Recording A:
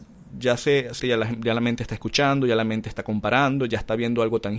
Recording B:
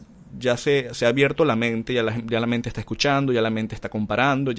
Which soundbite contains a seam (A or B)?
A